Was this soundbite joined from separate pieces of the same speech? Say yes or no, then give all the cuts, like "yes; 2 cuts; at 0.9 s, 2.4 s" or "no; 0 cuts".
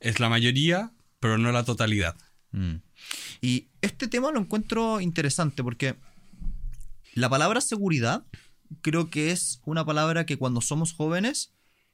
yes; 2 cuts; at 3.4 s, 7.0 s